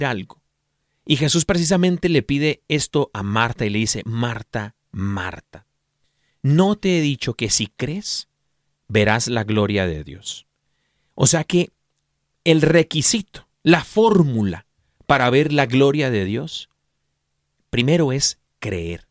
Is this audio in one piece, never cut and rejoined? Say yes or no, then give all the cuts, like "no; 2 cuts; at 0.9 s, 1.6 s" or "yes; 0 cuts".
yes; 0 cuts